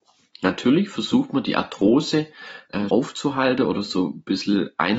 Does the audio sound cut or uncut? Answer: cut